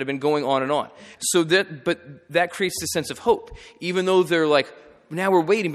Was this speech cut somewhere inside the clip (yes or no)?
yes